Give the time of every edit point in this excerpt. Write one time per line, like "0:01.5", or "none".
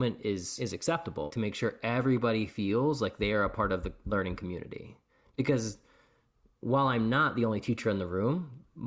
none